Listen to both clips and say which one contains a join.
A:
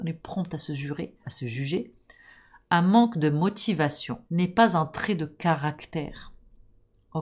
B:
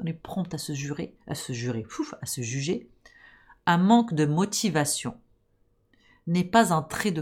A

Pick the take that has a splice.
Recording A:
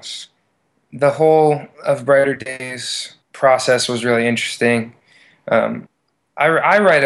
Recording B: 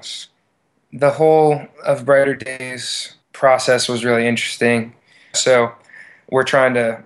B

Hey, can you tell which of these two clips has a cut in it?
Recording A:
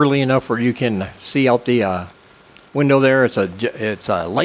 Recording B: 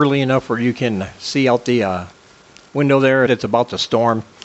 B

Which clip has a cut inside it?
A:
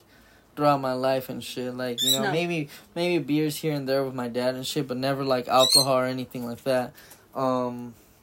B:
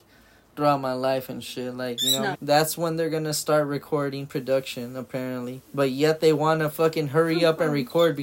B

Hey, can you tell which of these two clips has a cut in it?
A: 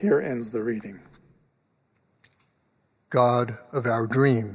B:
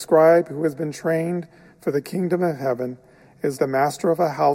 B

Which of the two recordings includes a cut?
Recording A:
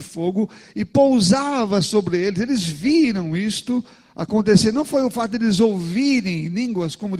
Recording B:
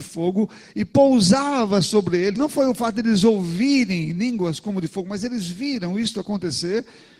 B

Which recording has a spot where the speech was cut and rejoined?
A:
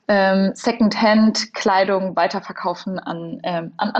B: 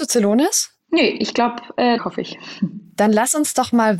B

